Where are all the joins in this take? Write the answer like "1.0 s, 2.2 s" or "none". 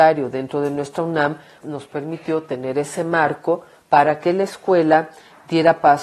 1.6 s